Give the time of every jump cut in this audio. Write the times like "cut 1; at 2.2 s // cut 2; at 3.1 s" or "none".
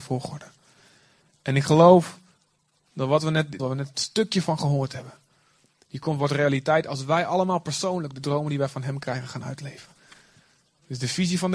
cut 1; at 3.6 s